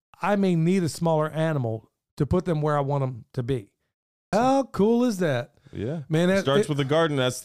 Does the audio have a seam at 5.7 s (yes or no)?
no